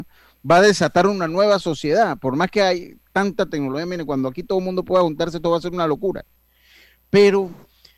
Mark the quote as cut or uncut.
uncut